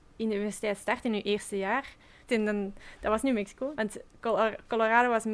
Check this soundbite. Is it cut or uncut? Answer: cut